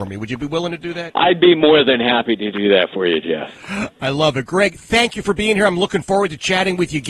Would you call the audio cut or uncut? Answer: cut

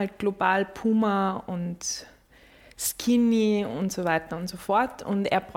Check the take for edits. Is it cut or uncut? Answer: uncut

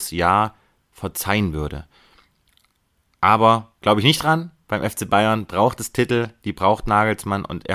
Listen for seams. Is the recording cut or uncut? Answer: uncut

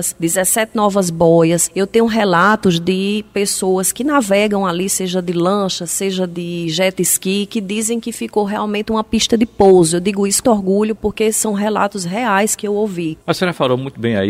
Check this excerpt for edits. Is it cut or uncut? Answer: cut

